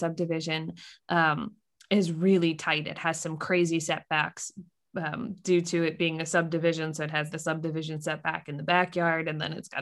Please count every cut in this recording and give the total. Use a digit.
1